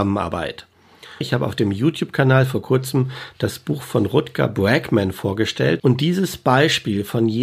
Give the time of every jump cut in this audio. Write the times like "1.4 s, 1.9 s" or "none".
1.2 s, 5.8 s